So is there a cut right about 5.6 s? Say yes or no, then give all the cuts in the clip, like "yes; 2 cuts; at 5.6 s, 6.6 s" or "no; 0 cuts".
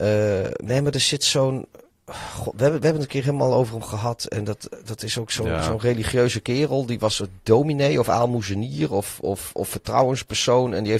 no; 0 cuts